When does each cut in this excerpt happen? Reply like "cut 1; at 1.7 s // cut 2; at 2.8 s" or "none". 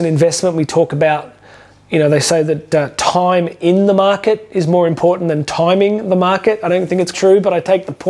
cut 1; at 7.1 s